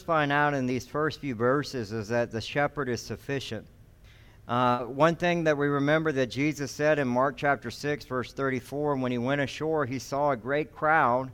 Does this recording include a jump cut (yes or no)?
no